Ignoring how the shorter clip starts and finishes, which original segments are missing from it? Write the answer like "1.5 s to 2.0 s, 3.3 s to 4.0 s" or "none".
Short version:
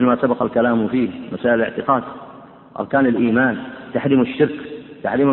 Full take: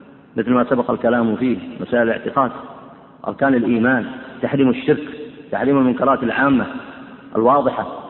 none